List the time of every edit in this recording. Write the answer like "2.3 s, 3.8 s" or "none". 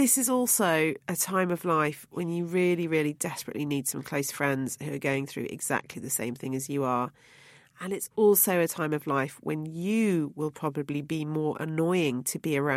none